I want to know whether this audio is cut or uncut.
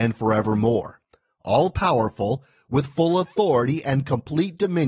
uncut